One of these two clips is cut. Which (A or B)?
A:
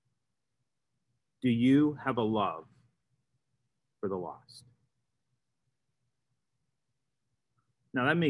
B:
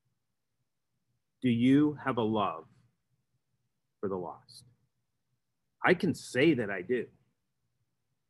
B